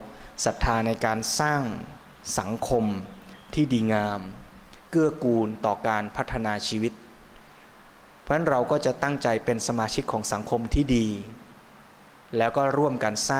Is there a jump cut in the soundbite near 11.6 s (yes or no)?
no